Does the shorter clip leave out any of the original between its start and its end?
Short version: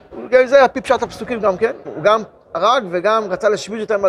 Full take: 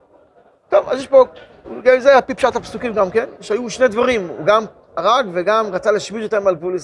yes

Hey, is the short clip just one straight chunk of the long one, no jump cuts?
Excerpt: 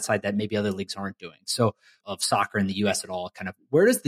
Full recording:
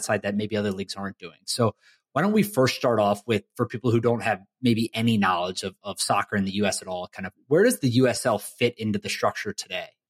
no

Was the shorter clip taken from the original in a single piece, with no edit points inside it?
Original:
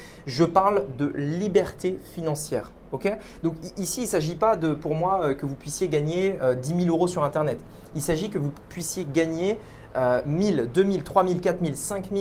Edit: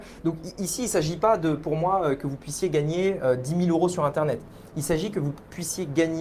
yes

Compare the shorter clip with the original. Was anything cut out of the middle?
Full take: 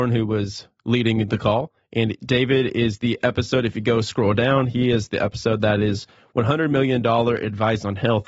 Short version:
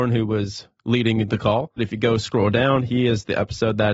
yes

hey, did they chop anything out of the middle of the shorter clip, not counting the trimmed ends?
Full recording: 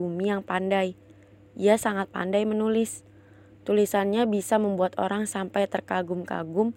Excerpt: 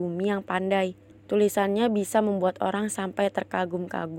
yes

